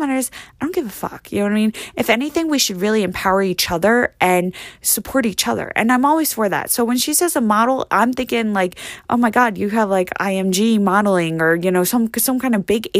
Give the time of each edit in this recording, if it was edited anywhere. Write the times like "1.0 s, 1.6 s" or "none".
none